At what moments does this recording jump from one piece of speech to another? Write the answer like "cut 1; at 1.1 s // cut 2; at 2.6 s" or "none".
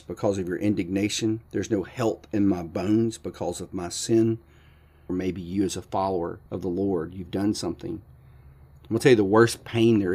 cut 1; at 5.1 s // cut 2; at 6.5 s